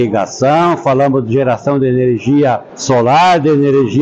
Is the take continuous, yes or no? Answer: yes